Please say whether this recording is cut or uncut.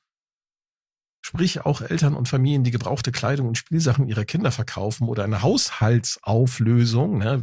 uncut